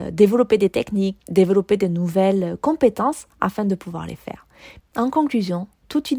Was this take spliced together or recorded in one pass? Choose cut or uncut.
cut